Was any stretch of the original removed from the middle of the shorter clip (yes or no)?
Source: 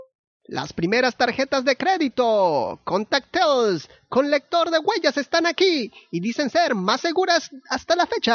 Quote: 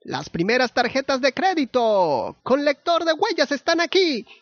yes